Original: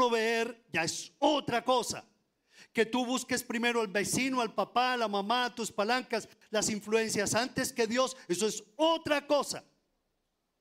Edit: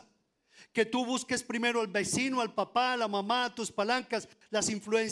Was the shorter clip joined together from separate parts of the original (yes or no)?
no